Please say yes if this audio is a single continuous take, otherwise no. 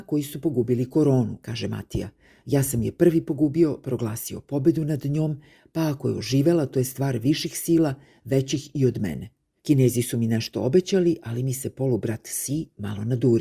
no